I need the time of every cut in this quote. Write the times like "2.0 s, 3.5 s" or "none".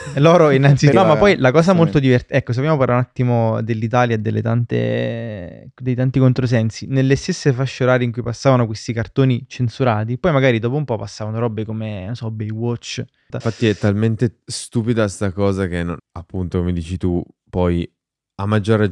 0.9 s, 16.0 s